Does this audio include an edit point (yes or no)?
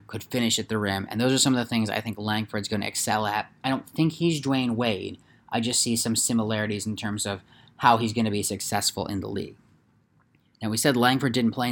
no